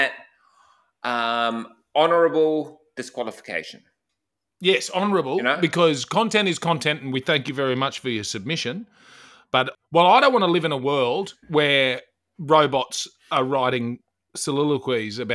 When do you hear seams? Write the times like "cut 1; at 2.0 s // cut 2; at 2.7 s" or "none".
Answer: cut 1; at 11.4 s